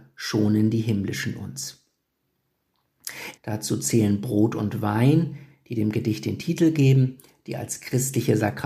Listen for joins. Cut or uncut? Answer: cut